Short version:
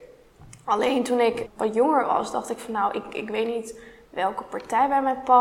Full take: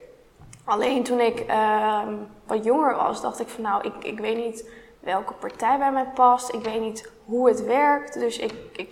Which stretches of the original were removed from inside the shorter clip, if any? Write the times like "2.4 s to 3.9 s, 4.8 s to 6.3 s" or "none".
1.5 s to 2.4 s